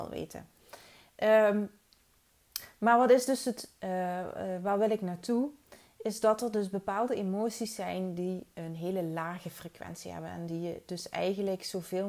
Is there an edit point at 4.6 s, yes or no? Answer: no